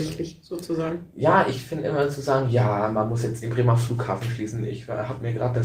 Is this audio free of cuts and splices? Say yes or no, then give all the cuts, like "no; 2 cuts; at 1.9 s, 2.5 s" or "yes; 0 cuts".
yes; 0 cuts